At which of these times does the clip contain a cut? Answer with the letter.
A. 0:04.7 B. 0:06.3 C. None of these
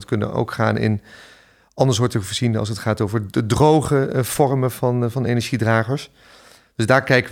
C